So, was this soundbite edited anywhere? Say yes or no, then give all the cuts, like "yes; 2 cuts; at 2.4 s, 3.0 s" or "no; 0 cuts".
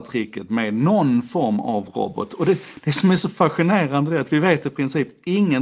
no; 0 cuts